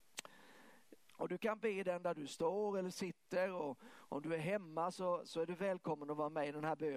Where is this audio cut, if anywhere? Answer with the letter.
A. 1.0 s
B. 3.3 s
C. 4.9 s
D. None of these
A